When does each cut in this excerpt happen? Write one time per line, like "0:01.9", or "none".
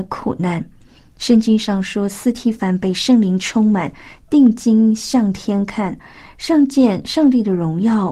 none